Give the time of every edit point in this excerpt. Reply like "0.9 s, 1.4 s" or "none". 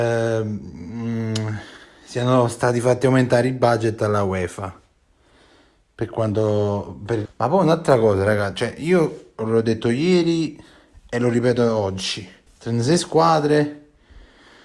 7.2 s, 12.5 s

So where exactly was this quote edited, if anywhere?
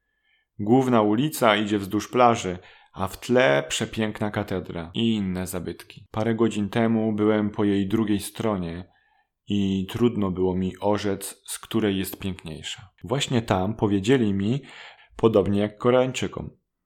6.1 s, 13.0 s, 15.0 s

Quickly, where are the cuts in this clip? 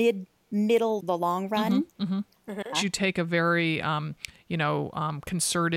1.0 s, 2.7 s

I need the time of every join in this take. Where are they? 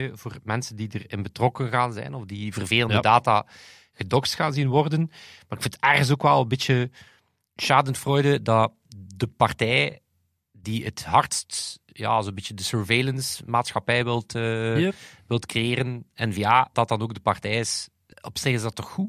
16.7 s, 18.1 s

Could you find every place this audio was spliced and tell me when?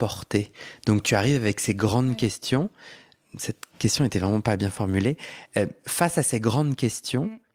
none

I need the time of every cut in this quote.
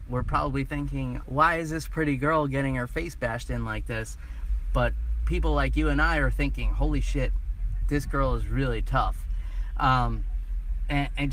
1.2 s

